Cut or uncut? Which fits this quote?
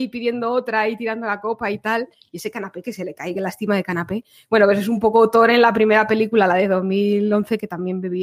uncut